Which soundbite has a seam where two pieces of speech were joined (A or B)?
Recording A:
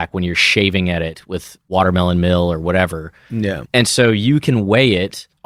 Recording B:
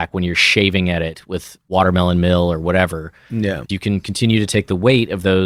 B